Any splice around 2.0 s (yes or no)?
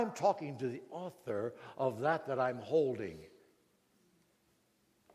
no